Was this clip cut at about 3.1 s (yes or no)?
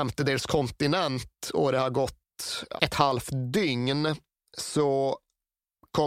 no